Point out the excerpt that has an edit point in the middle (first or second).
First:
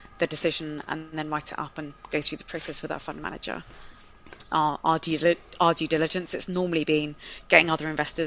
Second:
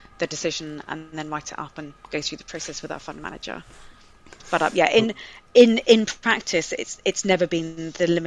first